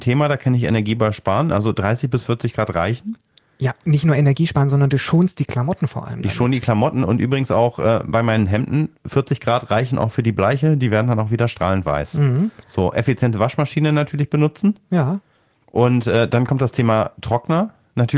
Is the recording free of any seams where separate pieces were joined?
yes; 0 cuts

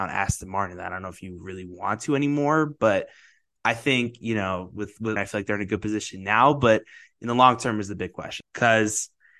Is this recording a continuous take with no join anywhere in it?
no; 2 cuts; at 5.2 s, 8.4 s

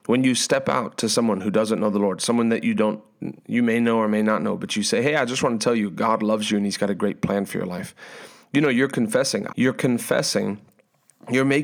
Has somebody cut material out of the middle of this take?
yes; 1 cut; at 9.5 s

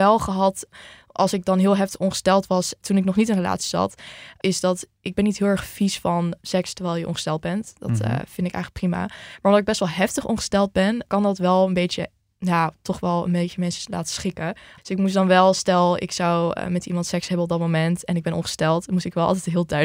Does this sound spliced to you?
yes; 1 cut; at 14.8 s

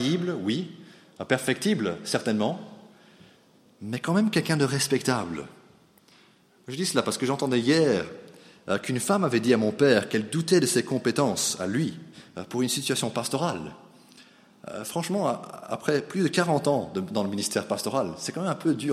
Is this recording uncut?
yes; 0 cuts

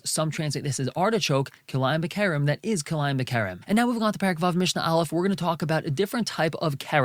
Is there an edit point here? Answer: no; 0 cuts

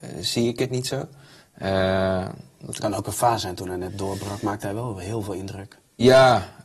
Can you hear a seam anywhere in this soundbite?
no; 0 cuts

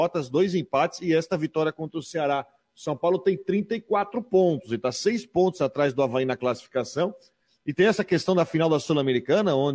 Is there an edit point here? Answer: no; 0 cuts

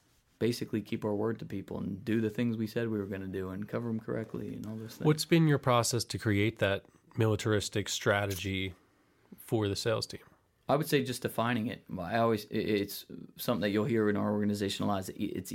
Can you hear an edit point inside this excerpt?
no; 0 cuts

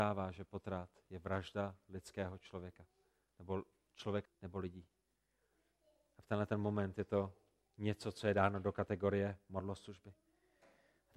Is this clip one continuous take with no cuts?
no; 1 cut; at 4.2 s

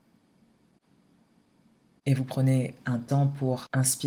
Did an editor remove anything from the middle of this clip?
no; 0 cuts

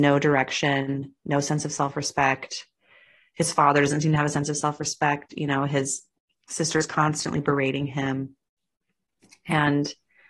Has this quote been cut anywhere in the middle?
no; 0 cuts

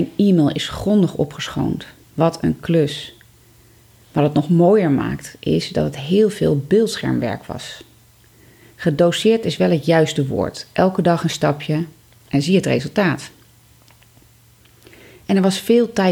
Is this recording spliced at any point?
yes; 1 cut; at 2.0 s

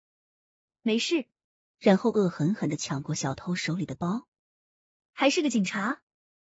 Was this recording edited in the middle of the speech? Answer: yes; 2 cuts; at 1.7 s, 5.0 s

